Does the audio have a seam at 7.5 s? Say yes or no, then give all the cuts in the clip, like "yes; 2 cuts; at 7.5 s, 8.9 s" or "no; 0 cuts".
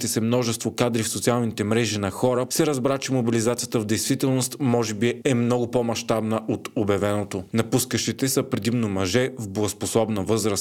yes; 2 cuts; at 2.5 s, 7.5 s